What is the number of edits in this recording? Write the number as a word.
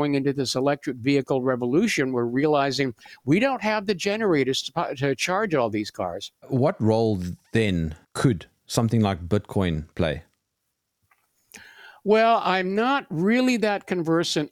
one